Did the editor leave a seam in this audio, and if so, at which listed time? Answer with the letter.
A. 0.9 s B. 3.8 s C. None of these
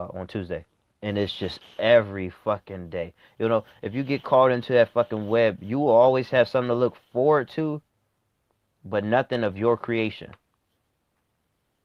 A